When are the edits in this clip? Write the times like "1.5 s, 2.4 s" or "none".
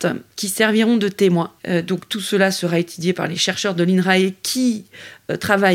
1.6 s